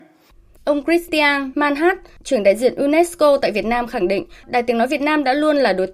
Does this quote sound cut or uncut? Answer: cut